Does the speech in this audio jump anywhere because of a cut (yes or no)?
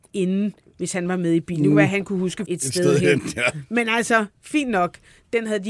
yes